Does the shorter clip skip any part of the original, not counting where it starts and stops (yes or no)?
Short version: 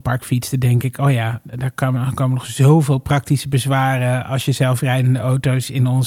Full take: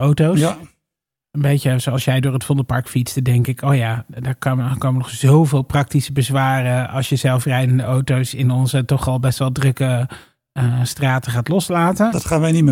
no